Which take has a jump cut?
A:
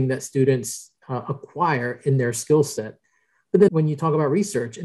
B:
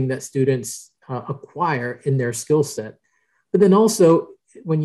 A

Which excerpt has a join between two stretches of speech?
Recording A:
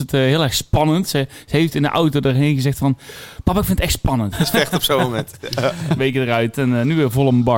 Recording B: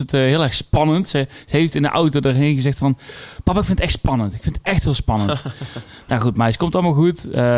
A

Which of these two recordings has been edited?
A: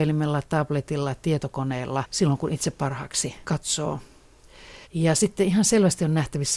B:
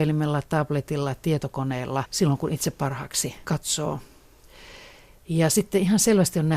A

